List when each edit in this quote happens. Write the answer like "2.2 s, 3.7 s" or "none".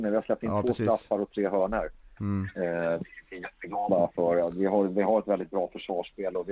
2.2 s